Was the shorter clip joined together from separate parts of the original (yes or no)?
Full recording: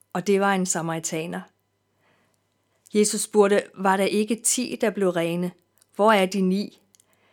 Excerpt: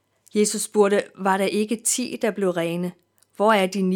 no